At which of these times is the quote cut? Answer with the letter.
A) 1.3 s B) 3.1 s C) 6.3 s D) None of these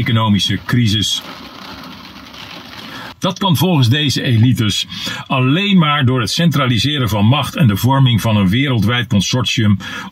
B